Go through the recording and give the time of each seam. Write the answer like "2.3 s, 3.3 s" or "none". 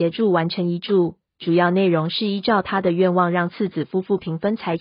none